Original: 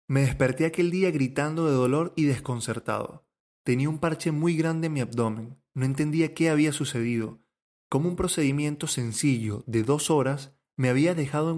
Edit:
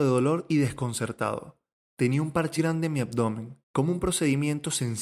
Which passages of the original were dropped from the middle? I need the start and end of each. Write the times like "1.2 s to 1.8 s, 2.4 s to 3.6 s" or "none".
4.2 s to 4.6 s, 5.6 s to 7.8 s